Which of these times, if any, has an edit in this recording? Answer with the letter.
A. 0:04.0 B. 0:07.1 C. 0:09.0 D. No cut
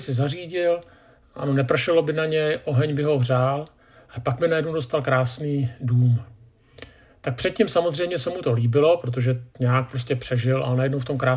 D